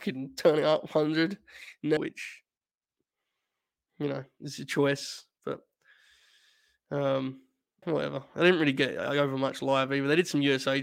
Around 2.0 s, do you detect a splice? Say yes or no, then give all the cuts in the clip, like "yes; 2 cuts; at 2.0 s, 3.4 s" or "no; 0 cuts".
yes; 2 cuts; at 2.0 s, 7.8 s